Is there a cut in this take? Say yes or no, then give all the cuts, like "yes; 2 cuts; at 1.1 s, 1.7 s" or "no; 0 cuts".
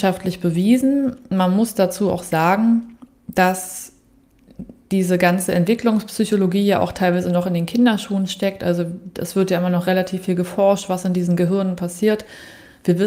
no; 0 cuts